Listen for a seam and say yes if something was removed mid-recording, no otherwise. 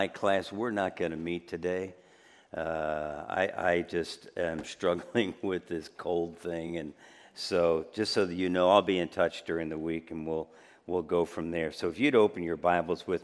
no